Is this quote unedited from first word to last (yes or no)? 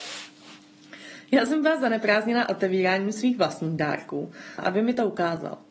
no